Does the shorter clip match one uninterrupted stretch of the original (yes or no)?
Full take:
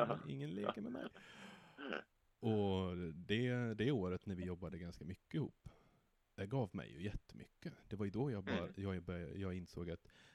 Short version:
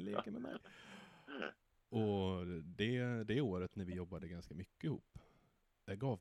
yes